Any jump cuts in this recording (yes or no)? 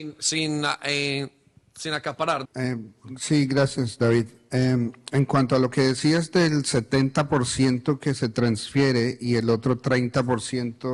yes